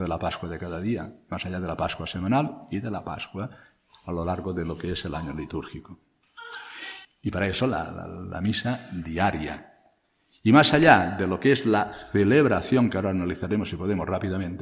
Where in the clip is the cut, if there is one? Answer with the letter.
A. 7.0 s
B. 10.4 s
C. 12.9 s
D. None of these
A